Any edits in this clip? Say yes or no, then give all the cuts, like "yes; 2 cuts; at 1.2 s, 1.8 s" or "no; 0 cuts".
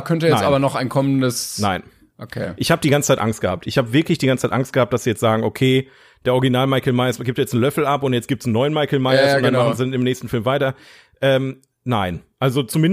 no; 0 cuts